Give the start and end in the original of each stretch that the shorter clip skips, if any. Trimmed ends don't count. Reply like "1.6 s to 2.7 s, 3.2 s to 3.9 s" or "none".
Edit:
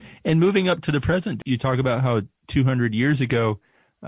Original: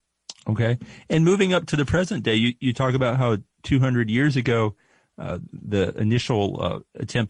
2.3 s to 2.6 s